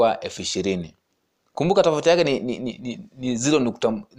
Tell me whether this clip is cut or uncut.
uncut